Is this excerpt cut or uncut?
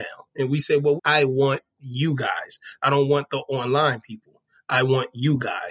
cut